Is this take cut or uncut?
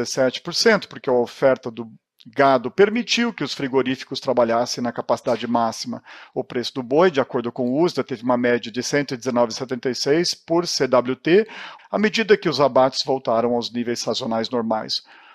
cut